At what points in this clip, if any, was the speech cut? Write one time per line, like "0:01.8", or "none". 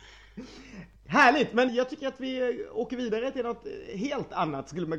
0:01.7